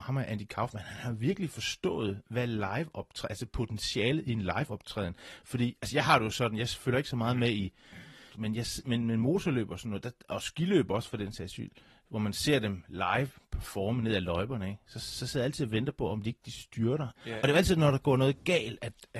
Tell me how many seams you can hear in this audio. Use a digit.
2